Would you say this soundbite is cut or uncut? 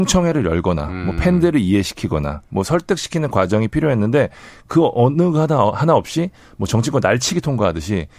uncut